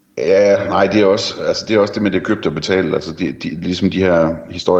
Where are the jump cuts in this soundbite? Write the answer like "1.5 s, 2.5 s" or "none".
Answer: none